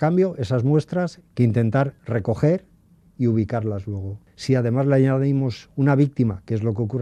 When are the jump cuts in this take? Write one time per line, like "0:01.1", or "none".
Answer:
0:01.2